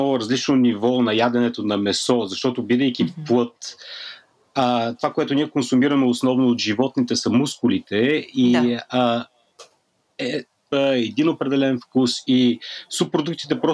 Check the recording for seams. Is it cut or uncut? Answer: cut